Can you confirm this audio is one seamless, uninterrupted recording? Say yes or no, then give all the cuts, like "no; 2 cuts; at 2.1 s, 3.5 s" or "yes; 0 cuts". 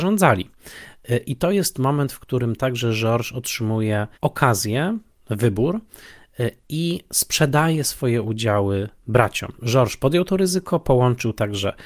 no; 2 cuts; at 4.1 s, 9.5 s